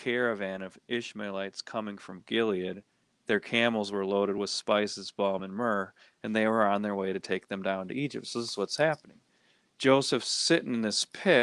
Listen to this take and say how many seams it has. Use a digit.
0